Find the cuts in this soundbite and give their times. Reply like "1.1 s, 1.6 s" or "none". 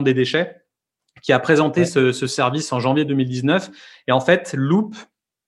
none